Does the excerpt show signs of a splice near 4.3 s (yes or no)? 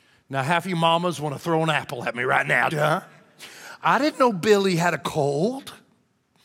no